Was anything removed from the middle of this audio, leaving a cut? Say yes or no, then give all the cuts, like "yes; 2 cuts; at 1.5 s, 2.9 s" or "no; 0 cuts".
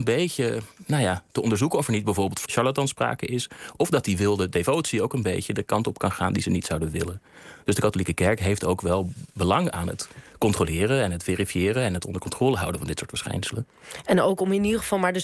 yes; 1 cut; at 2.5 s